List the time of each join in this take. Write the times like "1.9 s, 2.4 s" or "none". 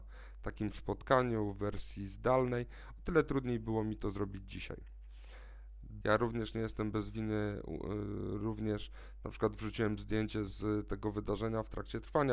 6.0 s